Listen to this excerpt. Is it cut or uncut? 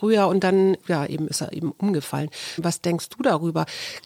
cut